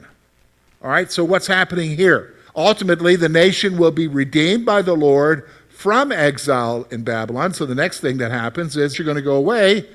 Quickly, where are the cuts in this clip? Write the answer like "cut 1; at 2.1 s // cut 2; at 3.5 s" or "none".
cut 1; at 2.5 s // cut 2; at 8.9 s